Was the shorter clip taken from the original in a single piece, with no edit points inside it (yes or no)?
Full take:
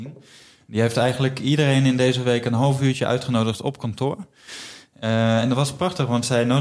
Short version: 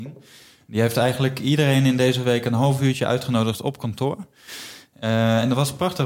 yes